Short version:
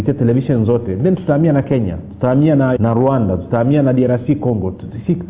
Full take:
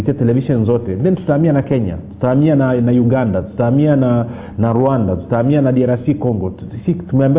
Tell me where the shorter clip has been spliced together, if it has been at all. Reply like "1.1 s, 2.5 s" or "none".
2.8 s